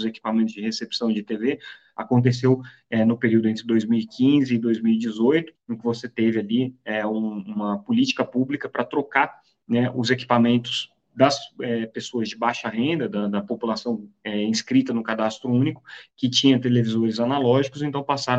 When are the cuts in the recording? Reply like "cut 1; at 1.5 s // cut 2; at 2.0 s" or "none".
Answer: cut 1; at 5.5 s

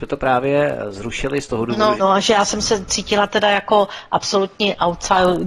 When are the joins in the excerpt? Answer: cut 1; at 2.0 s

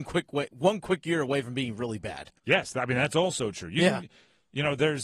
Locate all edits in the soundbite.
cut 1; at 2.4 s

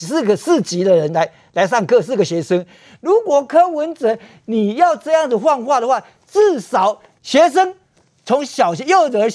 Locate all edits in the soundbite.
cut 1; at 7.2 s

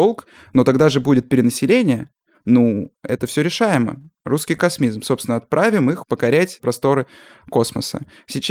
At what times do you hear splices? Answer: none

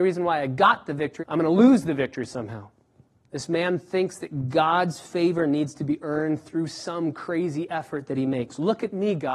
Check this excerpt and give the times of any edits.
cut 1; at 1.2 s // cut 2; at 3.3 s

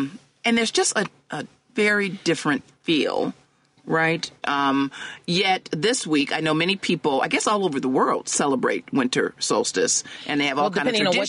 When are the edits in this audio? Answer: cut 1; at 4.4 s

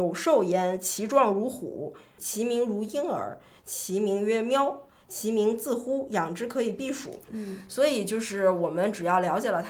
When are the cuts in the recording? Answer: cut 1; at 2.2 s // cut 2; at 7.3 s

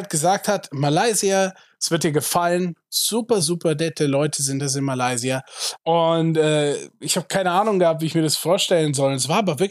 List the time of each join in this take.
cut 1; at 3.4 s // cut 2; at 5.8 s

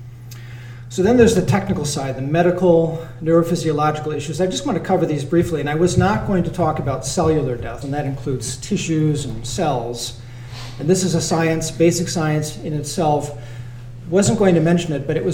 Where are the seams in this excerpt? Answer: cut 1; at 7.8 s

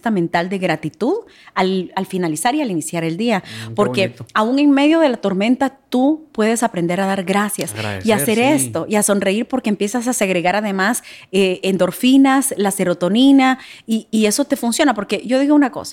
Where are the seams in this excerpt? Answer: none

